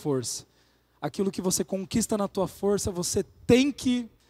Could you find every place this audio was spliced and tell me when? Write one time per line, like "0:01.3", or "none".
none

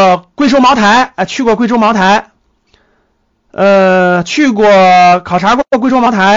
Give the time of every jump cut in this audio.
none

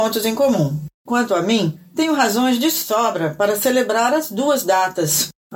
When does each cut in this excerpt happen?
0:01.0

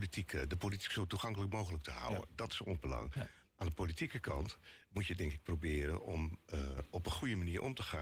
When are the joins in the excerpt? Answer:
none

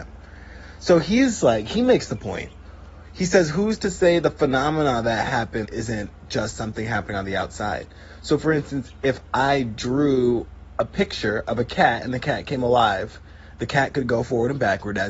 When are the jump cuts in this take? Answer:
0:05.6

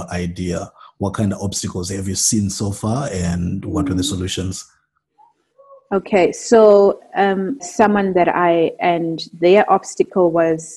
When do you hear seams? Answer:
0:07.6
0:08.8

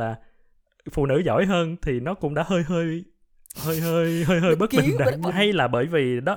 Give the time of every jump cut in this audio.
0:05.3

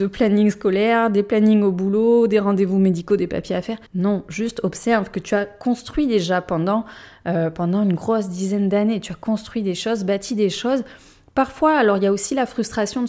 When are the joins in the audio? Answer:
0:03.9

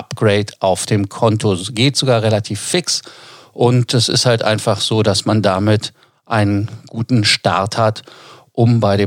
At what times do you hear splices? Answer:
none

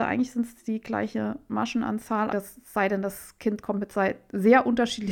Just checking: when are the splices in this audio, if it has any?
0:02.3

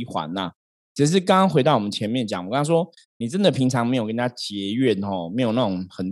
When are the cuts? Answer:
none

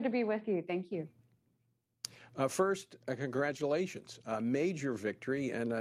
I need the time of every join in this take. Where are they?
none

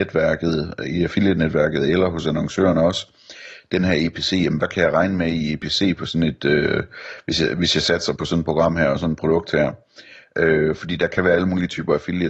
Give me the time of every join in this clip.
0:08.2

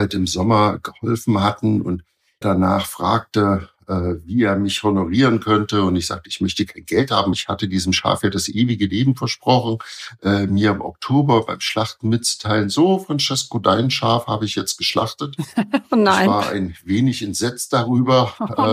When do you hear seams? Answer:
0:02.4
0:07.3

